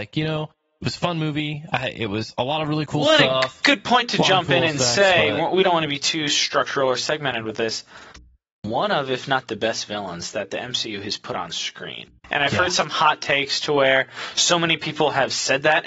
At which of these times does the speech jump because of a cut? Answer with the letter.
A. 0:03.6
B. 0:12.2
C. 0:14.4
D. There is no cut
B